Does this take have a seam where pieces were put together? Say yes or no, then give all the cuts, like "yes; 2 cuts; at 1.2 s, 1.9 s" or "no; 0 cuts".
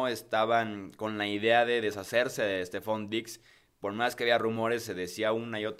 no; 0 cuts